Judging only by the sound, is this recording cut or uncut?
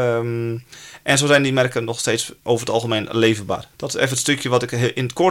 cut